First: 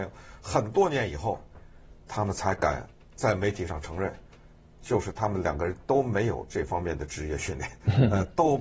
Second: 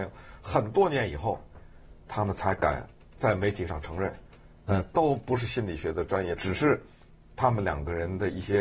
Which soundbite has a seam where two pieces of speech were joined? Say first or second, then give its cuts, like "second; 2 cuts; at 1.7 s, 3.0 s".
second; 2 cuts; at 4.7 s, 6.4 s